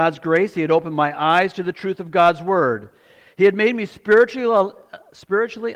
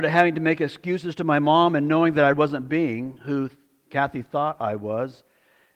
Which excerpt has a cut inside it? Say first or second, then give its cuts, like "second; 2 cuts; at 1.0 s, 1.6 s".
second; 1 cut; at 2.3 s